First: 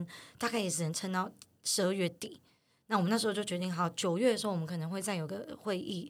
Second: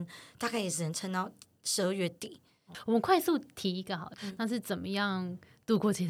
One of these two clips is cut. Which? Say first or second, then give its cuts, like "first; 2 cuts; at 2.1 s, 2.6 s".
second; 2 cuts; at 2.7 s, 4.2 s